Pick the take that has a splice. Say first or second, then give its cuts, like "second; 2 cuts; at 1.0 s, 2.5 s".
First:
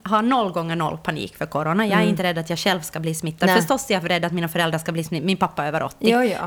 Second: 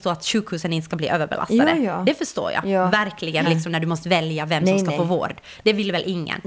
second; 1 cut; at 3.4 s